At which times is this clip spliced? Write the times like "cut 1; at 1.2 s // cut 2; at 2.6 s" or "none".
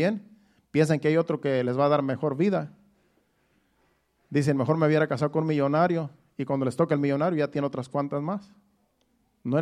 none

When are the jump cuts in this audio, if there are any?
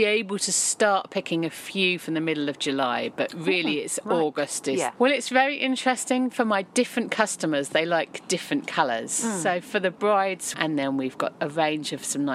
cut 1; at 4.9 s // cut 2; at 10.5 s

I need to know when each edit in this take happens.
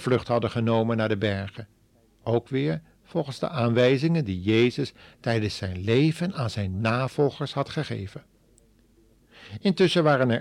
none

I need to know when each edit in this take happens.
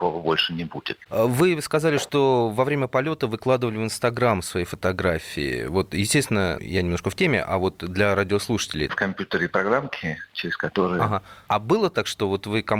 cut 1; at 6.6 s // cut 2; at 8.9 s // cut 3; at 11.5 s

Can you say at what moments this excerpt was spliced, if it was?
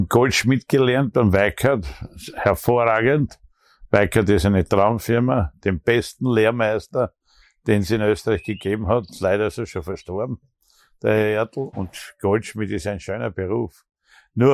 cut 1; at 11.7 s

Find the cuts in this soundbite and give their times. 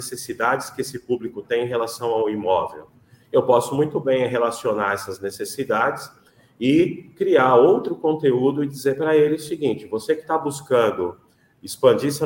none

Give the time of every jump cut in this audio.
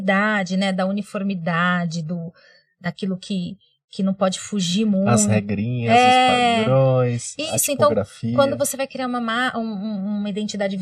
none

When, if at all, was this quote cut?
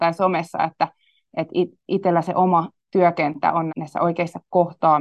cut 1; at 3.7 s

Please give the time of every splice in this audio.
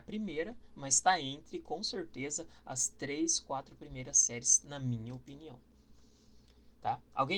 none

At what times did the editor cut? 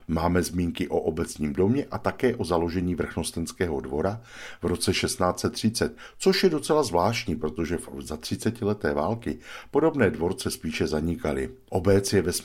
none

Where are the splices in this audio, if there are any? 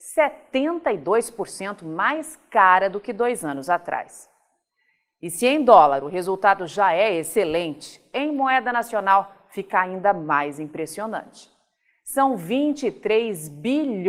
none

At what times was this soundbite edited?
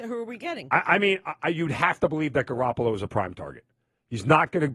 none

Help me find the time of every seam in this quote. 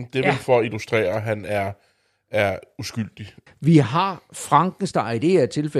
cut 1; at 3.5 s

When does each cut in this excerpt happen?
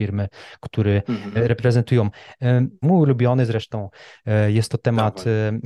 cut 1; at 2.8 s

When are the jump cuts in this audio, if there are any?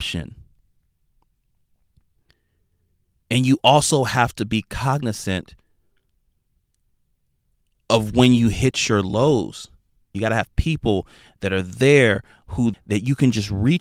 cut 1; at 10.1 s // cut 2; at 12.7 s

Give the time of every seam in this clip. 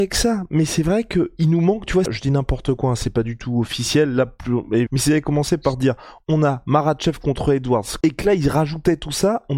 cut 1; at 2.1 s // cut 2; at 4.9 s // cut 3; at 8.0 s

